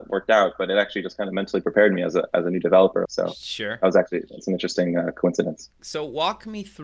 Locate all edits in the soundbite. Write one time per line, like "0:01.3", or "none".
0:03.0
0:05.8